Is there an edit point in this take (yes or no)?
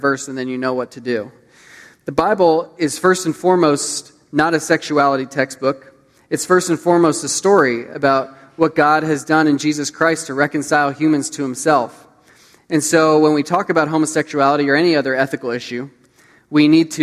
no